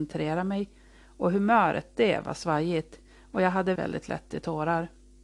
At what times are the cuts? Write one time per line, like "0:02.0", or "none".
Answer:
0:03.8